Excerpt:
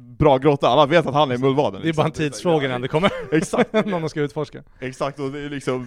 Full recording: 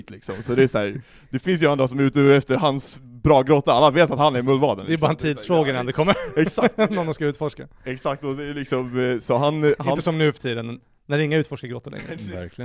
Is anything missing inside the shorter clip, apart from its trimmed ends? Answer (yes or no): no